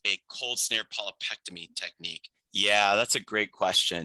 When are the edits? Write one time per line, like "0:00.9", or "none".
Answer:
0:02.3